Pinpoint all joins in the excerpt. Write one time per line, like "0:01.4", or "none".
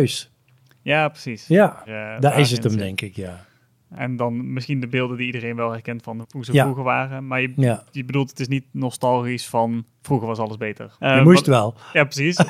0:01.9
0:06.2
0:10.9